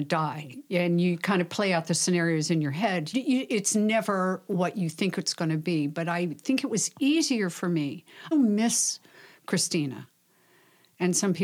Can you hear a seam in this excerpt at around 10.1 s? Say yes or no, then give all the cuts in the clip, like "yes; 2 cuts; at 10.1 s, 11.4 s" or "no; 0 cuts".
no; 2 cuts; at 3.1 s, 8.3 s